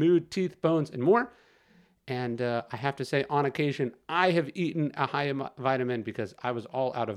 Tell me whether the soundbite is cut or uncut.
uncut